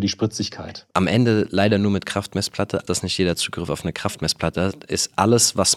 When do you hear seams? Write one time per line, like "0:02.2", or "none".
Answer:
0:00.9
0:02.9